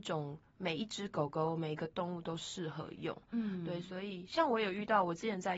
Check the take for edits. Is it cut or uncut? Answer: uncut